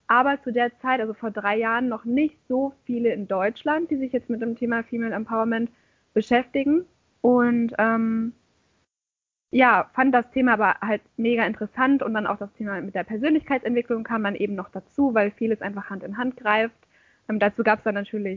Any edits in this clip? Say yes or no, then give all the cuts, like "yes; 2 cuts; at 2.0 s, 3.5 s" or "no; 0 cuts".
no; 0 cuts